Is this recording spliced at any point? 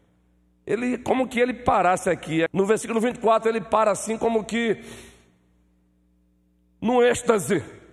yes; 1 cut; at 2.5 s

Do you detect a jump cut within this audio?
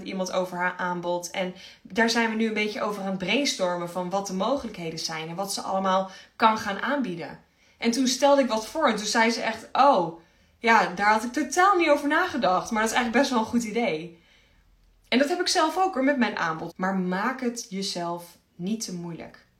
yes; 1 cut; at 16.7 s

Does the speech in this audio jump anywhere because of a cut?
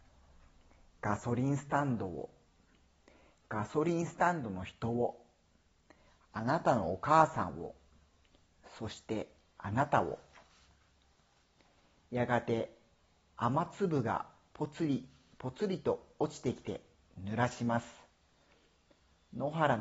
no; 0 cuts

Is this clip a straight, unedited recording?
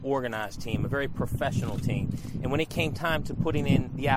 yes; 0 cuts

